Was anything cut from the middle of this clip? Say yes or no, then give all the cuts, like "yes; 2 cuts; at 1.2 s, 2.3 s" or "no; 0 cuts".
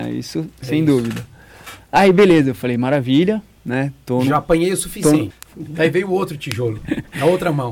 yes; 1 cut; at 5.3 s